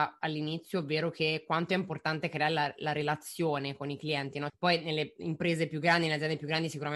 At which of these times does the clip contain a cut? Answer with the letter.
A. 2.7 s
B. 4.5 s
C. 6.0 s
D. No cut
B